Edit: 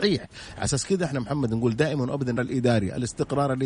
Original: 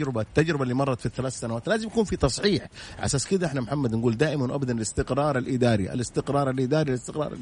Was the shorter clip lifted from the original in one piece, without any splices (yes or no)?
no